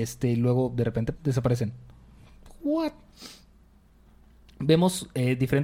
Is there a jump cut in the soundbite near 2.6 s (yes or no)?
no